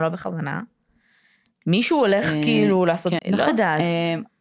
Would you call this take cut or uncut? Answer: cut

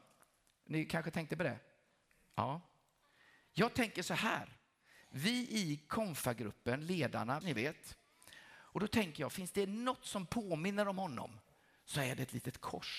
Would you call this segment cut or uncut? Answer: cut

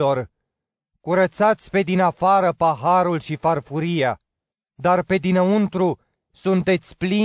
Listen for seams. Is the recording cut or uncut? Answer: uncut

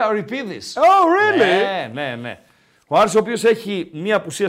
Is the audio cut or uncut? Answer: uncut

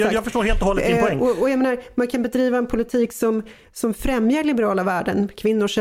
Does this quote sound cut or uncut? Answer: uncut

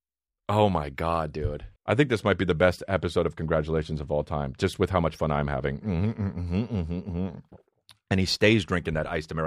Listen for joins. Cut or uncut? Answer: cut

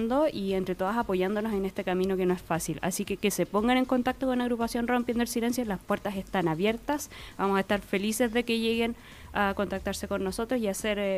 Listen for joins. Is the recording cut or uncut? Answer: uncut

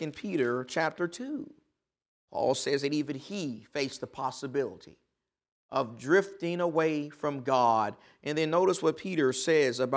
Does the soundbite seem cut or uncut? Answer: cut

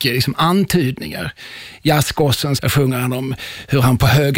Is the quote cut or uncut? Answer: cut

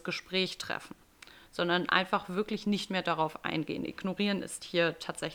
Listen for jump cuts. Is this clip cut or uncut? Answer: uncut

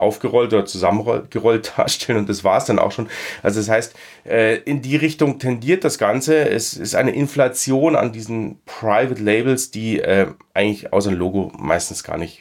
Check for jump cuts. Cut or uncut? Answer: uncut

